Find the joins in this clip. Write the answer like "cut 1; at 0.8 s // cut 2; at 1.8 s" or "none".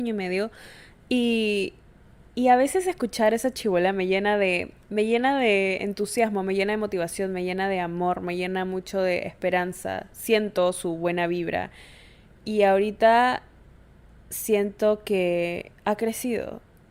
cut 1; at 4.8 s